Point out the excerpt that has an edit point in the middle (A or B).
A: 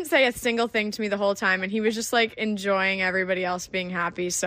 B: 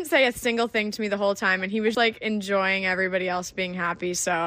B